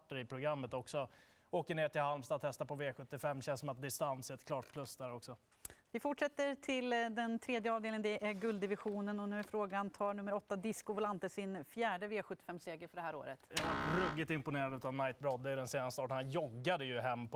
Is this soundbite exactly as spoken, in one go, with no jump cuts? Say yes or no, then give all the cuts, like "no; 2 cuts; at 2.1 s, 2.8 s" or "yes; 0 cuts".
no; 2 cuts; at 5.9 s, 13.5 s